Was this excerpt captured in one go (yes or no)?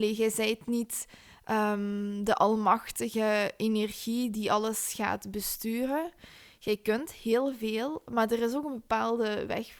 yes